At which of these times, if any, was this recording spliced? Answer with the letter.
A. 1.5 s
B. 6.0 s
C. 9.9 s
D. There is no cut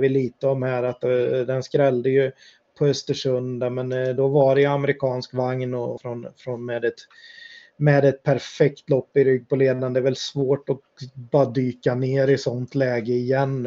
B